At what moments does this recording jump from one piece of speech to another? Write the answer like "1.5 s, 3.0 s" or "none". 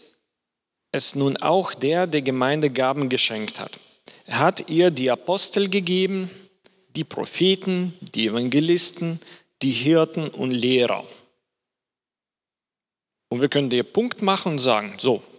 none